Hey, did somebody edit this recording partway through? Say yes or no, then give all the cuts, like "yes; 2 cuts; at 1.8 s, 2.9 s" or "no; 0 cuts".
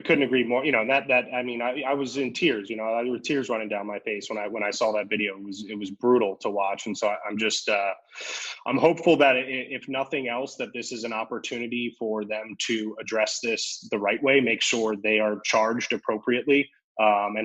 no; 0 cuts